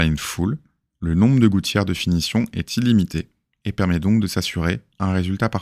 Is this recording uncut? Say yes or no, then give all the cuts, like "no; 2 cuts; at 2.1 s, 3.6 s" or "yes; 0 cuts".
yes; 0 cuts